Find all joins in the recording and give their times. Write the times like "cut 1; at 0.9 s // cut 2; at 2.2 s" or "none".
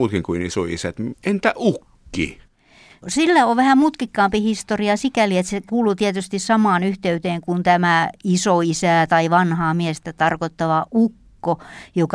cut 1; at 1.1 s